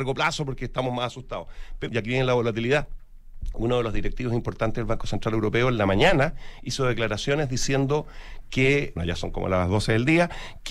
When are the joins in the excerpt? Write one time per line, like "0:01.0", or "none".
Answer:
0:01.9
0:09.0